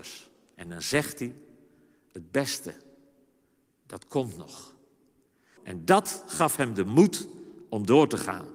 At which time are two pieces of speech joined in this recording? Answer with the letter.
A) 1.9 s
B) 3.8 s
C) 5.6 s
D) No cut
C